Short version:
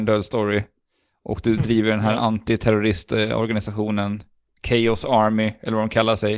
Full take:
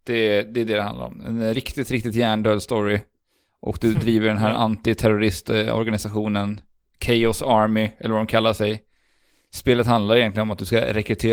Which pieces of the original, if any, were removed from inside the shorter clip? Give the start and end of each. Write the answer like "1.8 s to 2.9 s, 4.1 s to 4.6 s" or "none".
none